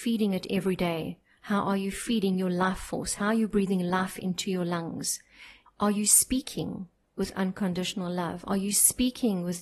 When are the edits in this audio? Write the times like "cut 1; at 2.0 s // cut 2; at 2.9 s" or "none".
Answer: cut 1; at 5.7 s